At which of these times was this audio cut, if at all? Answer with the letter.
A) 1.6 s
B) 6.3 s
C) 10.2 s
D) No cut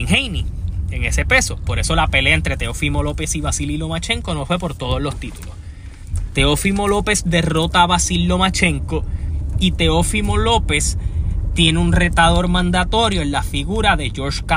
D